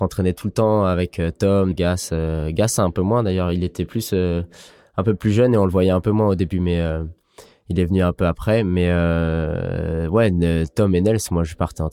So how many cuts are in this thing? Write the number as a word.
one